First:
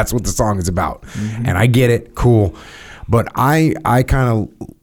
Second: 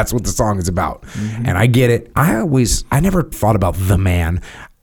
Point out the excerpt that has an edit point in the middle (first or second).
second